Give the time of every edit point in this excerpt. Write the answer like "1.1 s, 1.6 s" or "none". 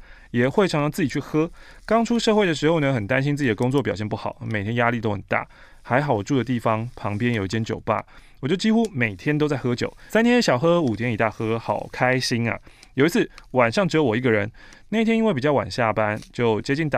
none